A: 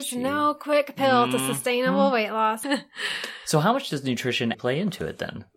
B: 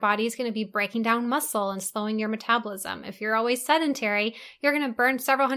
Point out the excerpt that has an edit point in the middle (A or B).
A